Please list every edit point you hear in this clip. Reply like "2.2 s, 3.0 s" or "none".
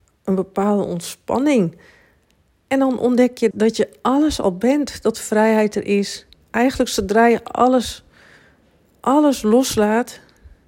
3.5 s